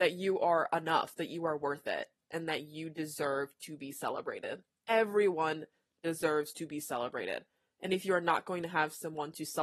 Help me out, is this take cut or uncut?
uncut